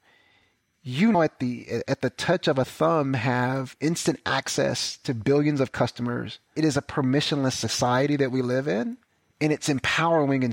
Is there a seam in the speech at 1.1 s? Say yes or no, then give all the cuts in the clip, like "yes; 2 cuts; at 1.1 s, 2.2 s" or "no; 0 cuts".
yes; 1 cut; at 1.1 s